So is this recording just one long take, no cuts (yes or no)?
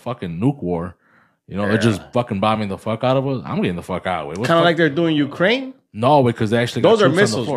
yes